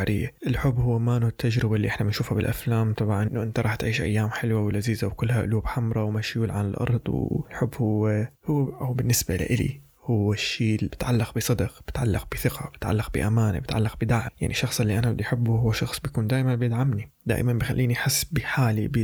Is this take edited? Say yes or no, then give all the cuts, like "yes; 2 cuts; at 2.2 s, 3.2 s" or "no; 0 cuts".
yes; 1 cut; at 7.5 s